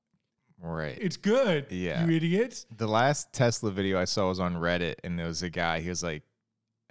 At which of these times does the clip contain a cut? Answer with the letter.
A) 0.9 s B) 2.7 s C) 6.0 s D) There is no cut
D